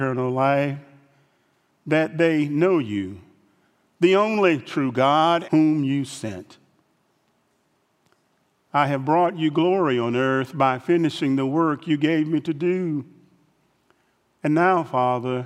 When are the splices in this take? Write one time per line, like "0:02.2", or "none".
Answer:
0:05.4